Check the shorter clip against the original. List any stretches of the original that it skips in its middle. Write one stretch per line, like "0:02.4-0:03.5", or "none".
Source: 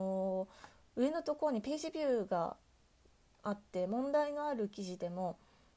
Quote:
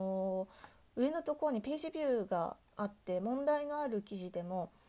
0:02.7-0:03.3

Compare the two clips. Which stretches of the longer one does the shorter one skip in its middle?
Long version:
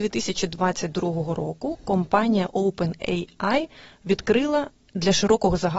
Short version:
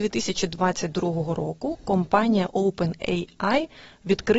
none

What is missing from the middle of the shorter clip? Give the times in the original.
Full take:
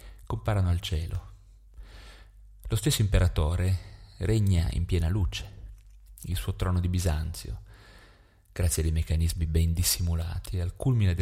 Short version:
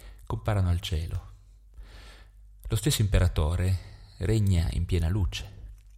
none

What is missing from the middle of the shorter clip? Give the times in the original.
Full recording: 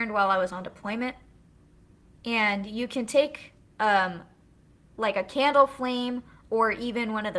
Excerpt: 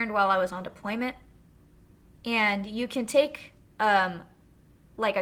none

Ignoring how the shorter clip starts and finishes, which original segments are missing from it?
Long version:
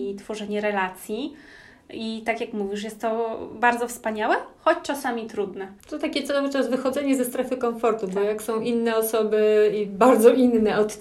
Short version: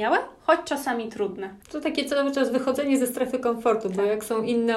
none

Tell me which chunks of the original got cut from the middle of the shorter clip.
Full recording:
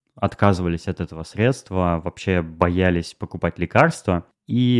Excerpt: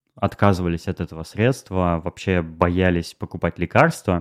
none

